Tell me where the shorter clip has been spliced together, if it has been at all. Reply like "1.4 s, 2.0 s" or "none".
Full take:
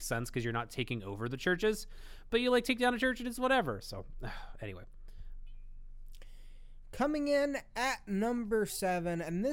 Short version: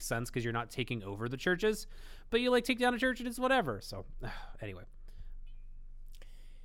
none